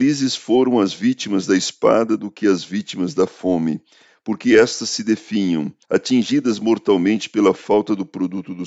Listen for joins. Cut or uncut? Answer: cut